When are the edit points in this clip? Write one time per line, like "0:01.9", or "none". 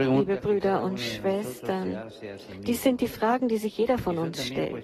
none